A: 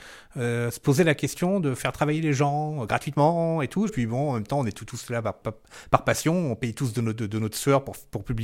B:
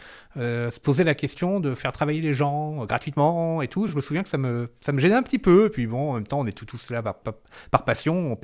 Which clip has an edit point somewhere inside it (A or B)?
A